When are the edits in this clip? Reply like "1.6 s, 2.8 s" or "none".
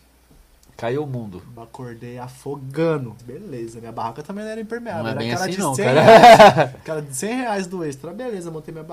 1.6 s, 3.2 s